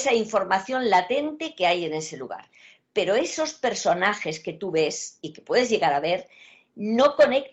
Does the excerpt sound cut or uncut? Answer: uncut